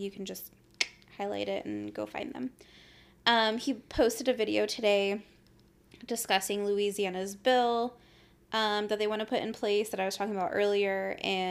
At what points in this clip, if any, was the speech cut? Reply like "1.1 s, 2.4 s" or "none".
none